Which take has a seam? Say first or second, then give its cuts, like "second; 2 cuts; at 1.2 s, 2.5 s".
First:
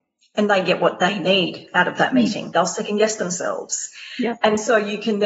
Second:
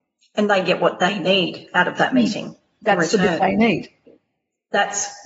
first; 1 cut; at 2.5 s